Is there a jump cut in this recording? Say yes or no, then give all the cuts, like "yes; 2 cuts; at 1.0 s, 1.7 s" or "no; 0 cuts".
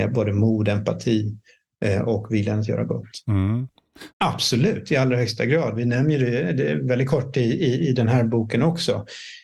yes; 1 cut; at 4.1 s